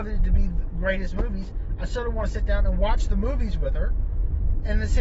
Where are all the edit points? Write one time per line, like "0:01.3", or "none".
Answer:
none